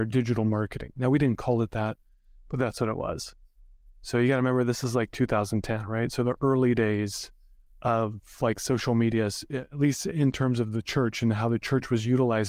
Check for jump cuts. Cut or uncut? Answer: uncut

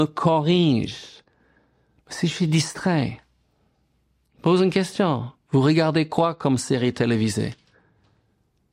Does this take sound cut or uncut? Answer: uncut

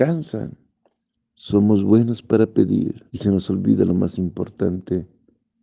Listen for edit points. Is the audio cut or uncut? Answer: cut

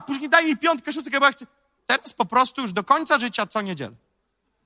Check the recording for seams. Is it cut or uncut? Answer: cut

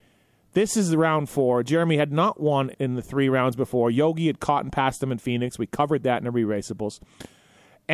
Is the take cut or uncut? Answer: cut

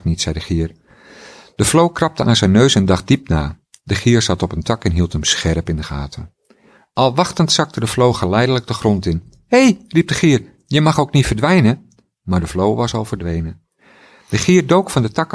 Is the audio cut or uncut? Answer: uncut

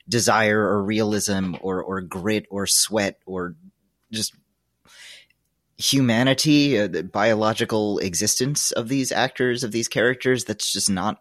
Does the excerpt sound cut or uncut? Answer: uncut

